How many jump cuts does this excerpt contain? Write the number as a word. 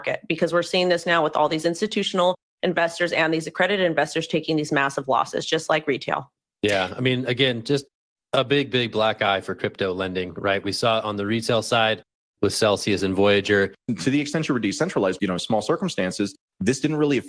two